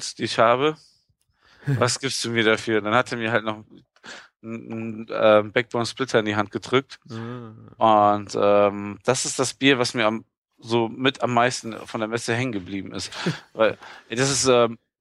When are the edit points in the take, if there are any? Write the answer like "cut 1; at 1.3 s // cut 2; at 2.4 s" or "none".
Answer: none